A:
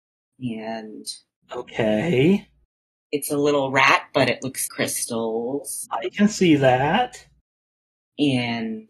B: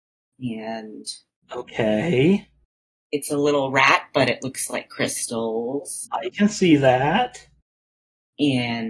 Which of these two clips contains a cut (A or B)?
A